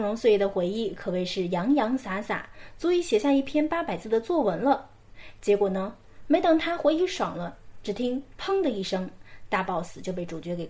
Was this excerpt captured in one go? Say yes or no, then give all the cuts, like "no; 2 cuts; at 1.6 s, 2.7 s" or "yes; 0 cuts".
yes; 0 cuts